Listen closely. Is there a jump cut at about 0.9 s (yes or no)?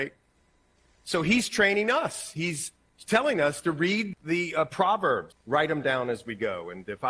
no